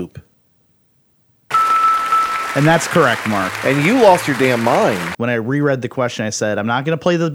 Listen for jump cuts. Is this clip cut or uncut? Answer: cut